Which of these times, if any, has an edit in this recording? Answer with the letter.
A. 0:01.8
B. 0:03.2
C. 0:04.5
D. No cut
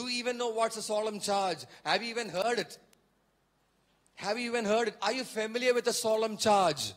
D